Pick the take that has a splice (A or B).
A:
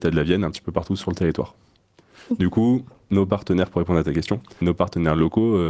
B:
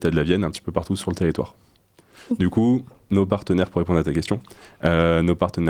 A